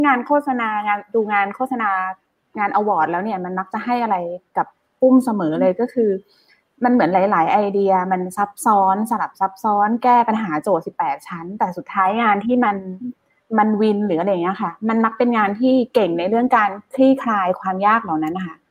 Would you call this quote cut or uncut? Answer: uncut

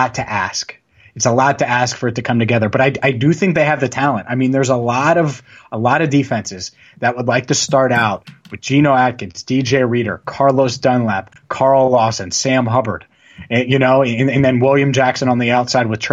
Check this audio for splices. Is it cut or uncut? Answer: uncut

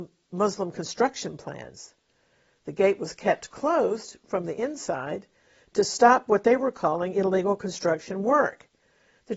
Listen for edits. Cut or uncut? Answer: uncut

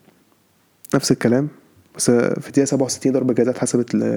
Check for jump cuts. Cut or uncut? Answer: uncut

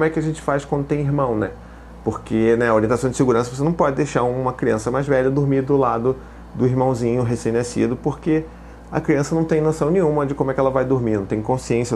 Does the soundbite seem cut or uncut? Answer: uncut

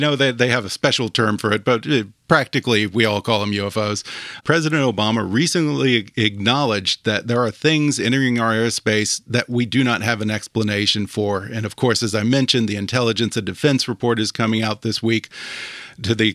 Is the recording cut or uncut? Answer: uncut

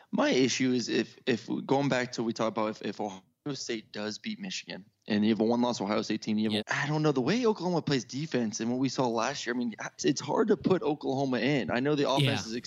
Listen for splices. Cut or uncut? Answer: cut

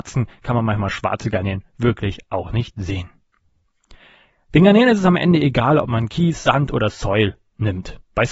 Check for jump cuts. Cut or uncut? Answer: uncut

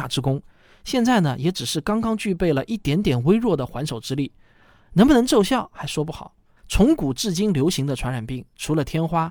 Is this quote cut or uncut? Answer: cut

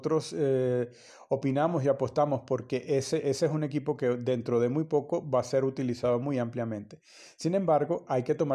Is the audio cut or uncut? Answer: uncut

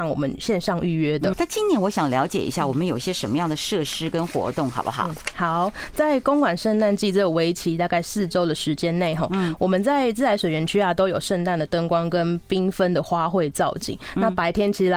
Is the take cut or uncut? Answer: cut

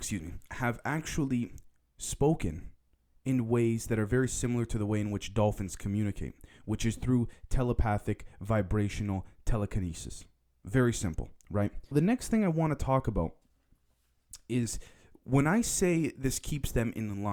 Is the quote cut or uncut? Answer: cut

